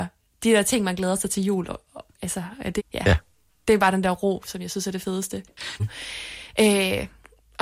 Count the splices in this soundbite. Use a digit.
2